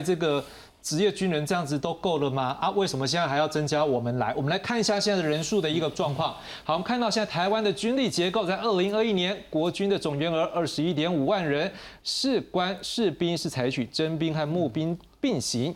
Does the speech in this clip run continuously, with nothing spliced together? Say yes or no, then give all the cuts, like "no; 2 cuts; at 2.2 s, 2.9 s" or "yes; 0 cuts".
no; 1 cut; at 12.0 s